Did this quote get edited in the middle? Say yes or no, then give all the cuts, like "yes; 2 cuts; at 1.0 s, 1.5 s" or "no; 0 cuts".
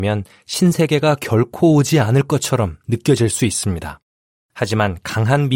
no; 0 cuts